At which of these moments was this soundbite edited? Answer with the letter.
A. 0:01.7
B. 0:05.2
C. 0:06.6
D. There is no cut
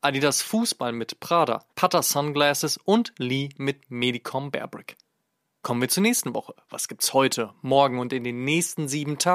A